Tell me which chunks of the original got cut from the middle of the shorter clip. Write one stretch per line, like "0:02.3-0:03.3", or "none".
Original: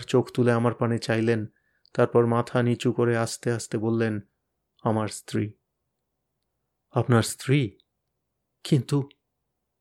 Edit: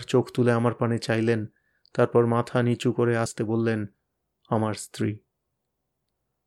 0:03.3-0:03.6